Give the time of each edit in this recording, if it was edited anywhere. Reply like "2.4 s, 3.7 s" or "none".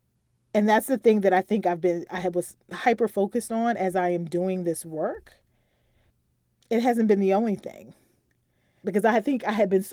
8.8 s